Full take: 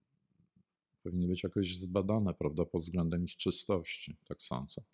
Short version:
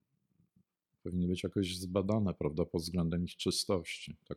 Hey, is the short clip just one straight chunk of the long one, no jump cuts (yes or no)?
yes